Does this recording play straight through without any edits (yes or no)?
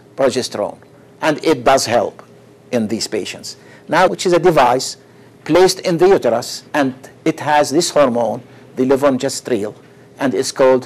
no